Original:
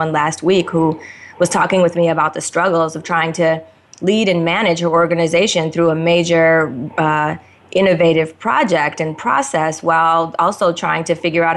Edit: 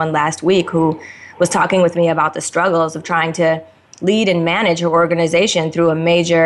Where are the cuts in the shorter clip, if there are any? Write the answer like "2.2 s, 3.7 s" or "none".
none